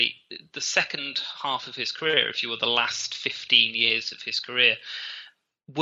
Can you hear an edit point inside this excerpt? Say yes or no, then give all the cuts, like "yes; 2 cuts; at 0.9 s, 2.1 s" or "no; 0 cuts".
no; 0 cuts